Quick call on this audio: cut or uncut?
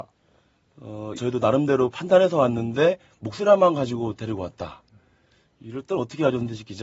cut